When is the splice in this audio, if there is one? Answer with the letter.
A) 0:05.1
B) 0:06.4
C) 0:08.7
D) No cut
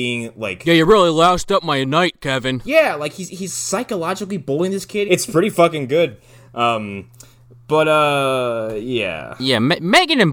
A